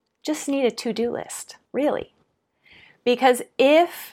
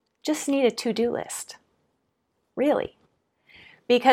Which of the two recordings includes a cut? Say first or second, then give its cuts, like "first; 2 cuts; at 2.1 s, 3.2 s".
first; 1 cut; at 1.7 s